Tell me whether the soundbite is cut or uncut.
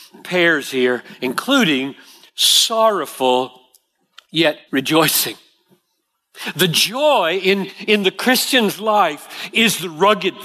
cut